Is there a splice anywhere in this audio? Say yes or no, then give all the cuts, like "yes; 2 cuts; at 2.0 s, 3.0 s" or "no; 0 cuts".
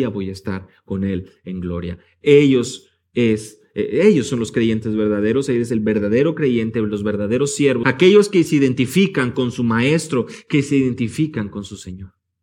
yes; 1 cut; at 7.8 s